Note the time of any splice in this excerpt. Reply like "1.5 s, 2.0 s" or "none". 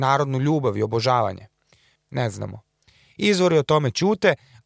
2.0 s